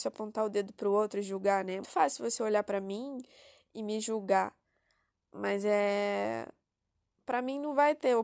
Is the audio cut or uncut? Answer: cut